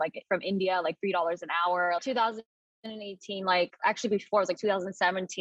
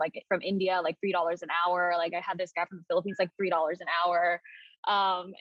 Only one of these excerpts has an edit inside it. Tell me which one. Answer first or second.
first